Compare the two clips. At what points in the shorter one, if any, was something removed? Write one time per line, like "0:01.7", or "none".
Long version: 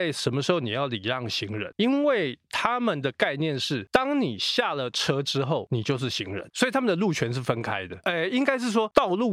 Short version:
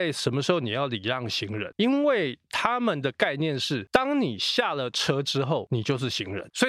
none